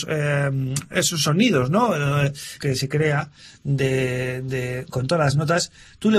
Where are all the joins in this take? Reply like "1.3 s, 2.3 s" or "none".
2.6 s